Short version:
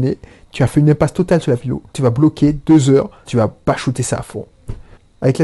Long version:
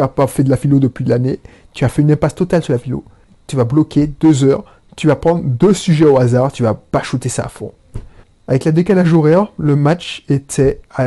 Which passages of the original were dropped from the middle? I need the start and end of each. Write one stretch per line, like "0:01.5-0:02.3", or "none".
0:03.1-0:03.4
0:04.8-0:06.5